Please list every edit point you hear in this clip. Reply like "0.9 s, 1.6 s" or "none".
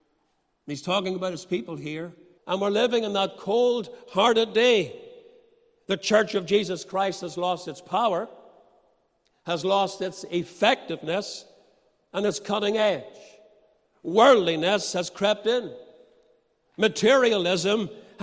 2.4 s